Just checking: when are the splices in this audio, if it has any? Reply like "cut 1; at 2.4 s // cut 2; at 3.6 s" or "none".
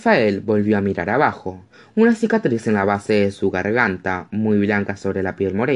none